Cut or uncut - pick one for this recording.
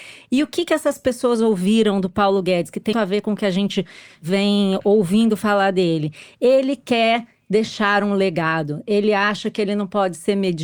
cut